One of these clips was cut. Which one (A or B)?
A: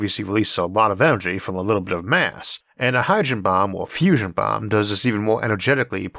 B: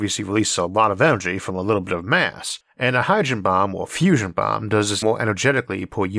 B